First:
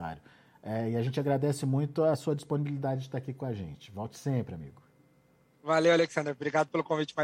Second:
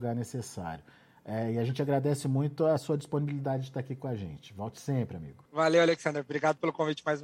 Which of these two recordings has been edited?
second; 1 cut; at 5.5 s

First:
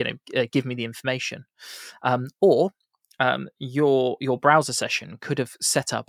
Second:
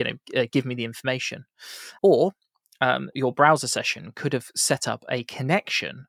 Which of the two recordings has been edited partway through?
second; 2 cuts; at 2.0 s, 3.1 s

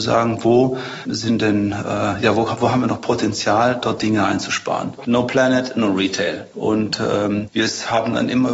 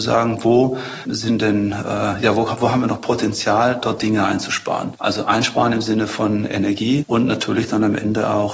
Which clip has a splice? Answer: first; 2 cuts; at 5.0 s, 6.5 s

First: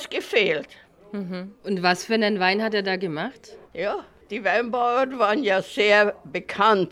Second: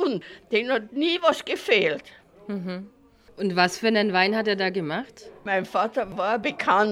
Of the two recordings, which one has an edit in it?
first; 2 cuts; at 1.6 s, 3.7 s

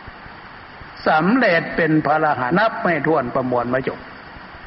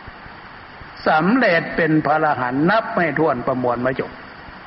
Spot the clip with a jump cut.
first; 1 cut; at 2.5 s

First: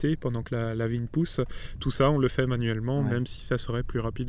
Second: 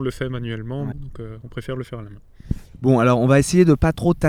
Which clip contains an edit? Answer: second; 1 cut; at 0.9 s

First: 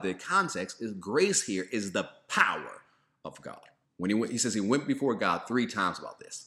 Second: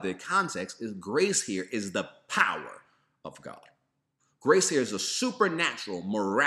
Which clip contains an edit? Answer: first; 1 cut; at 3.8 s

